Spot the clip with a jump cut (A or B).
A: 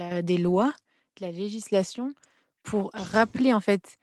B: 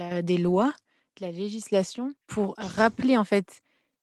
B